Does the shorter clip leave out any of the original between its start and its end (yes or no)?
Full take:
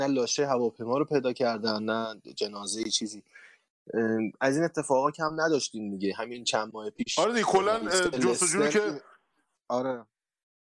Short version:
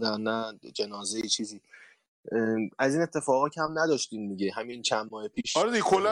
no